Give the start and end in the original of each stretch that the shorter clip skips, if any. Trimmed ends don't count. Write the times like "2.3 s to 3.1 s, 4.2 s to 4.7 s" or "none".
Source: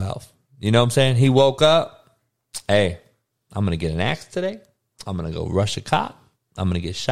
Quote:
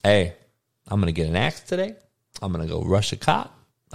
none